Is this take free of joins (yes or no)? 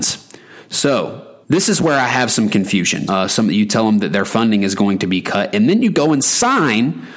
no